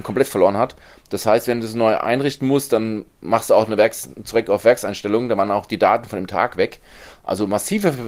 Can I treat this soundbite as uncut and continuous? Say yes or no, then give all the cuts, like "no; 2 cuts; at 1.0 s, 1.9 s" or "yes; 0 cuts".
yes; 0 cuts